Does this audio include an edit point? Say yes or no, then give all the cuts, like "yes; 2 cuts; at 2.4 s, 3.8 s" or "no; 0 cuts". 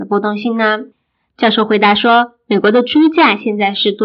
no; 0 cuts